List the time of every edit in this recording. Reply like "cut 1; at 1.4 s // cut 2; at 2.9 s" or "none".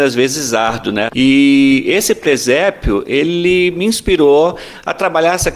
cut 1; at 1.1 s